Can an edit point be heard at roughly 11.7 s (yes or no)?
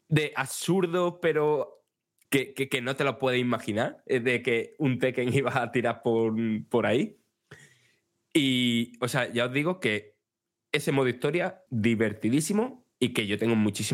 yes